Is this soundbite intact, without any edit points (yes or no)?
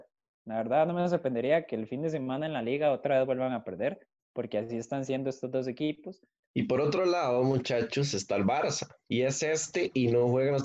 no